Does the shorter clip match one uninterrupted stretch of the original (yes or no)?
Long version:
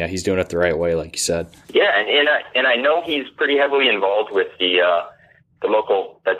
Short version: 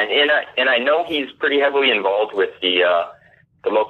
yes